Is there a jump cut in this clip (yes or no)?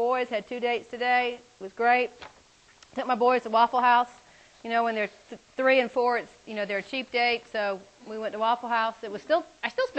no